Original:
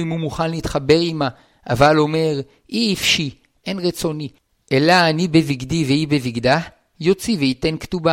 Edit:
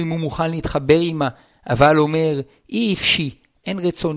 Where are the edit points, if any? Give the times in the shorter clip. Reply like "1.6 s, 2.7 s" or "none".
none